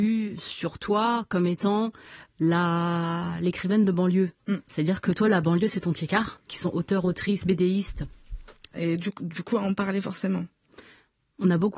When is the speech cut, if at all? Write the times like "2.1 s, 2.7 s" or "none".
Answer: 6.5 s, 8.7 s